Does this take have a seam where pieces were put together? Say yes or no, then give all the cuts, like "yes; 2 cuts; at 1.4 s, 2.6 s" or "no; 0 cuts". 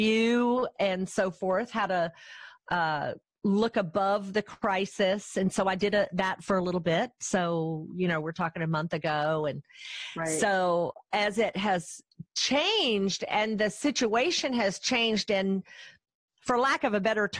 no; 0 cuts